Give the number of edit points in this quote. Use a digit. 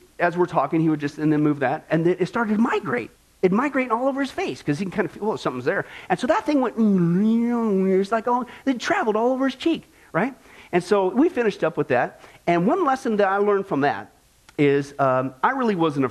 0